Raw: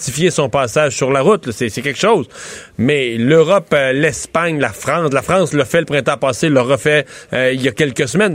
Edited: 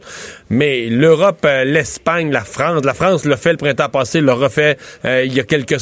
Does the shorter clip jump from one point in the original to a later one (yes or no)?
no